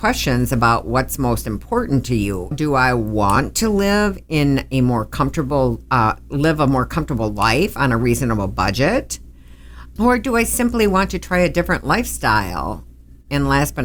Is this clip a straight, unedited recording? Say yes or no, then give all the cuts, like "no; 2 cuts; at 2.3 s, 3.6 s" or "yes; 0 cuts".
no; 2 cuts; at 2.5 s, 10.0 s